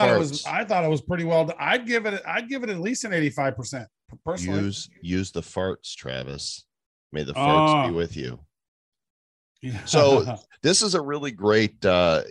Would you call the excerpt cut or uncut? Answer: uncut